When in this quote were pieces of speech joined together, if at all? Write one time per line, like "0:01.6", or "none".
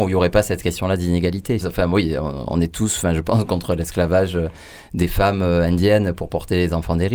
0:01.6